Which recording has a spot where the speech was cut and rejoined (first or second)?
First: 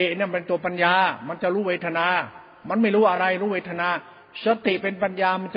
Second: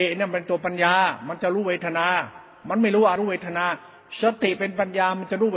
second